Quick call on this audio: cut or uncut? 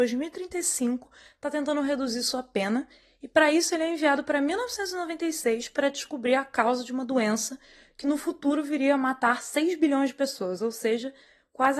uncut